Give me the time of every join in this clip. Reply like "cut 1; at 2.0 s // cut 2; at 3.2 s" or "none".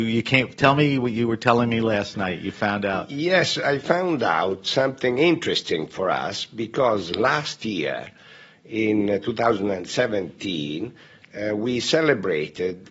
none